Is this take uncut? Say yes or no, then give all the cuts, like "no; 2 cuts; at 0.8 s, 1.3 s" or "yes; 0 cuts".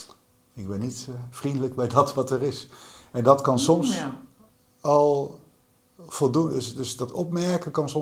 yes; 0 cuts